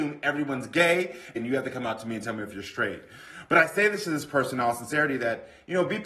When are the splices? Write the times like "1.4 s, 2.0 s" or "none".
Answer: none